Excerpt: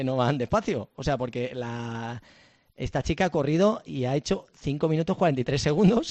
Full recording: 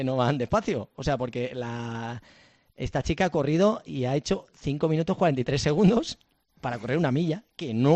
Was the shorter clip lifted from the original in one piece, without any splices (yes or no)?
yes